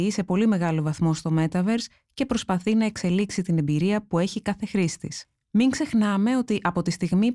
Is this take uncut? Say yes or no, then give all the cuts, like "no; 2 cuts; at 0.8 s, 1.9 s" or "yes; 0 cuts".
yes; 0 cuts